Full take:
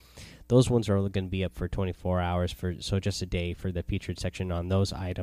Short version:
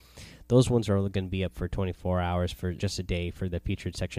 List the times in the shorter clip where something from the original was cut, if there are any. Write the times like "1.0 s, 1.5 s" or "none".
2.8 s